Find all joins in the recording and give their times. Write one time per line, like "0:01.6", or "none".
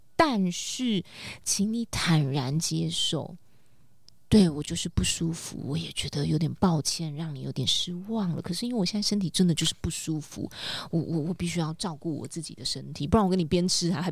none